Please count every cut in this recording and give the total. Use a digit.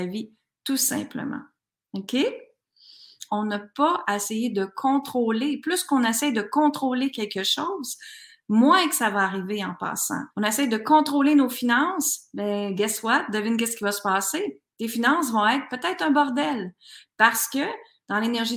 2